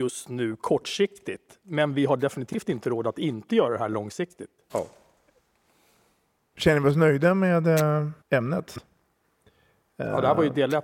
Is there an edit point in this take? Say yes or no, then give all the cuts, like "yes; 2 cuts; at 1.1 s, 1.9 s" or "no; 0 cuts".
yes; 2 cuts; at 4.7 s, 8.2 s